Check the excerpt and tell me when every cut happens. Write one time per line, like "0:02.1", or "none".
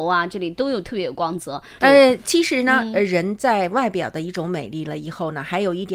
0:01.8